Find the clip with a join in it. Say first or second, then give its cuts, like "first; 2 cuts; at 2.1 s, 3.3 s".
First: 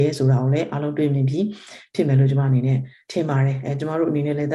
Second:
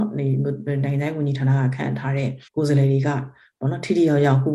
second; 1 cut; at 2.5 s